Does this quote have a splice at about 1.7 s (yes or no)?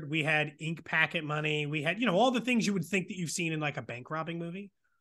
no